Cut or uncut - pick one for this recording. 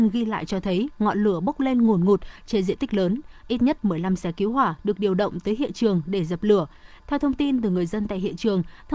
uncut